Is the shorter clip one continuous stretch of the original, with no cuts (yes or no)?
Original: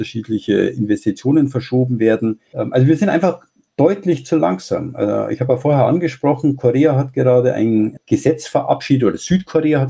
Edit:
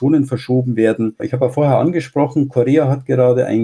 no